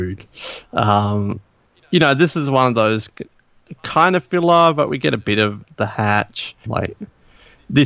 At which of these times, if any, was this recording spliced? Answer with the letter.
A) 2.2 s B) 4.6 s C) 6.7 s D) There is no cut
C